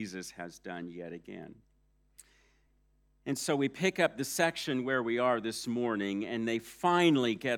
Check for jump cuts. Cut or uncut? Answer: uncut